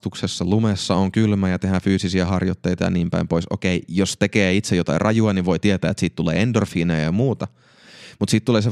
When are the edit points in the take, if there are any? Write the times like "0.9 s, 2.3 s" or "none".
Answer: none